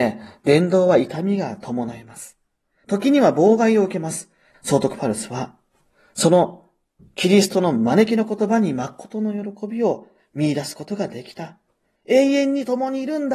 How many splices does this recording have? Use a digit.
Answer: 2